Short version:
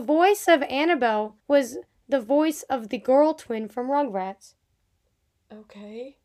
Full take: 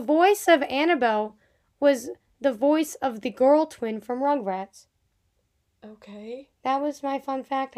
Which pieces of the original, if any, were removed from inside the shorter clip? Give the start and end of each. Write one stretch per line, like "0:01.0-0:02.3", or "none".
0:01.4-0:01.7